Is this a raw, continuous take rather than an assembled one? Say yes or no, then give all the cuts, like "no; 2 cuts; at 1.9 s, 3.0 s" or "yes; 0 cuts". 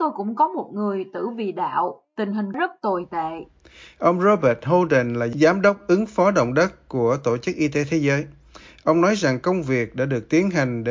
yes; 0 cuts